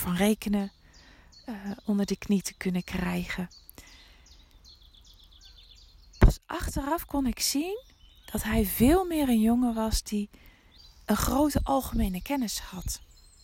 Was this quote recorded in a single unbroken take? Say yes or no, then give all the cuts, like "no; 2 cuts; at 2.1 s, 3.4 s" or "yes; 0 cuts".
yes; 0 cuts